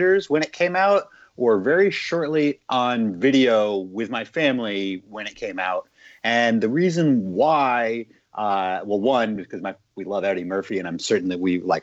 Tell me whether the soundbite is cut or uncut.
uncut